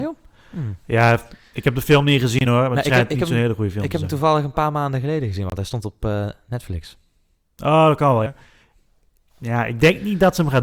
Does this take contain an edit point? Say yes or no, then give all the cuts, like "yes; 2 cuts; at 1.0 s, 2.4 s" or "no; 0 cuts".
yes; 1 cut; at 8.3 s